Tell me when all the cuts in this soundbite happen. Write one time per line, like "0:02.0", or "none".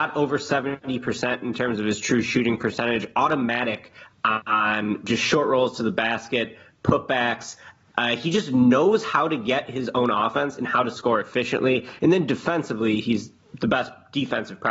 none